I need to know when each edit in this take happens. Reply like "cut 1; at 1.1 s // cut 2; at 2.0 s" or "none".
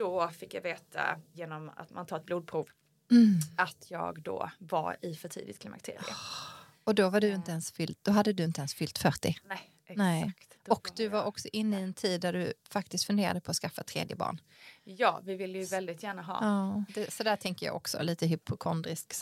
cut 1; at 1.3 s // cut 2; at 16.9 s